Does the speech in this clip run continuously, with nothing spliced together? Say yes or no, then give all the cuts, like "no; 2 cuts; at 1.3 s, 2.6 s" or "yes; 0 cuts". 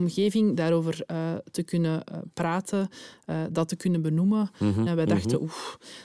no; 1 cut; at 4.9 s